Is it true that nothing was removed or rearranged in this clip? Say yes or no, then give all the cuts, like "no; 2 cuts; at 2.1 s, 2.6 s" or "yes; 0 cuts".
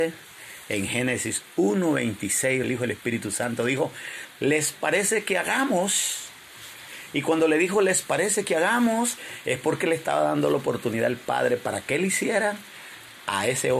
no; 1 cut; at 2.6 s